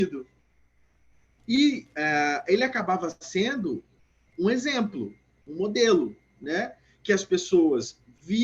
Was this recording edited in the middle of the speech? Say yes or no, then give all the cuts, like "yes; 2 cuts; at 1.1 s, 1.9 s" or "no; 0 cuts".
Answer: yes; 2 cuts; at 1.4 s, 4.3 s